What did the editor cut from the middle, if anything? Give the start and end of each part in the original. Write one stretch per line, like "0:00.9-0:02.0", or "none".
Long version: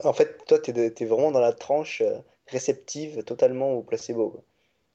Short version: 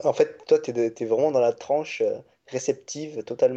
none